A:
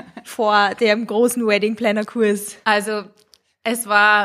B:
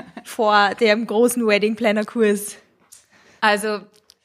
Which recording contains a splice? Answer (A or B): A